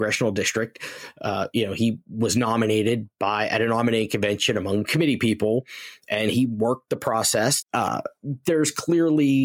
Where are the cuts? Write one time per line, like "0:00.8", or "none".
0:07.6